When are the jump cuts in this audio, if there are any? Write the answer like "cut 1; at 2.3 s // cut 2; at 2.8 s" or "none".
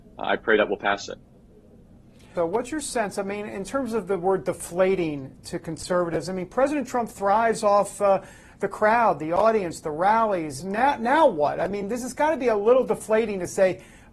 cut 1; at 2.4 s // cut 2; at 10.6 s